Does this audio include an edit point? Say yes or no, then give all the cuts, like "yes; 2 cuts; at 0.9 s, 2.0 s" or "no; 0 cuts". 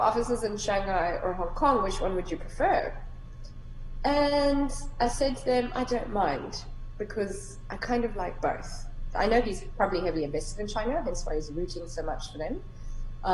yes; 1 cut; at 9.1 s